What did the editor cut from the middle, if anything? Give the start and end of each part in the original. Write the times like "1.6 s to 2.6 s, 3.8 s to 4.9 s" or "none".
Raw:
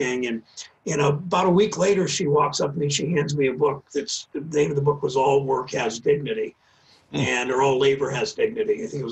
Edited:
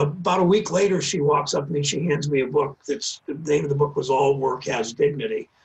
none